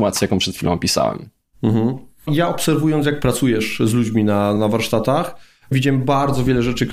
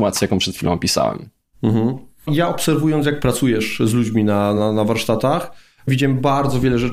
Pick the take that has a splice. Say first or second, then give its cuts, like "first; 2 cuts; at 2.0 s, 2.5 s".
first; 1 cut; at 4.6 s